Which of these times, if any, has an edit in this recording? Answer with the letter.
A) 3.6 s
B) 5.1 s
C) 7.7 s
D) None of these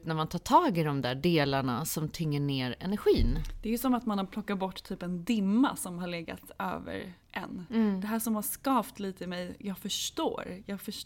C